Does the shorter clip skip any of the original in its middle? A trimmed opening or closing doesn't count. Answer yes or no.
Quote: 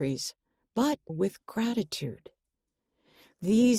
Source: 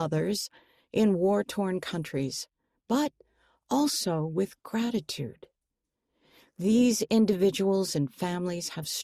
yes